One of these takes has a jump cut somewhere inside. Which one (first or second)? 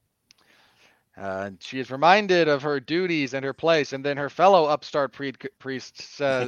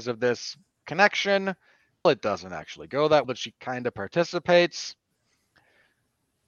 second